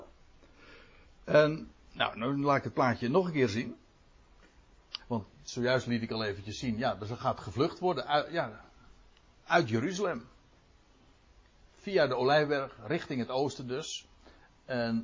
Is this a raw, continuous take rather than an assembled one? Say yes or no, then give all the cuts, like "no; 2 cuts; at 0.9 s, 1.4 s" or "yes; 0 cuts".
no; 1 cut; at 5.0 s